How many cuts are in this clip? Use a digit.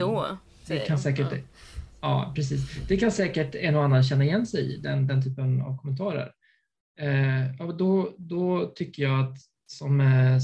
0